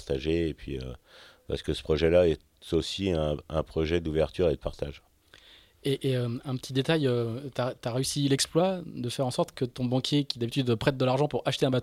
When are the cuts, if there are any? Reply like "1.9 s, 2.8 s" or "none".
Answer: none